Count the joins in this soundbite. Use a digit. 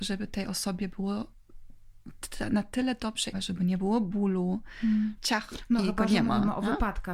2